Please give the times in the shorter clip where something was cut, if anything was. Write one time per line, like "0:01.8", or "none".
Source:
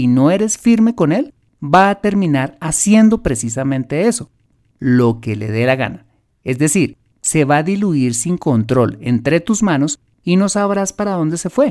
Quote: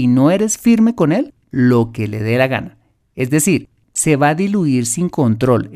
0:01.4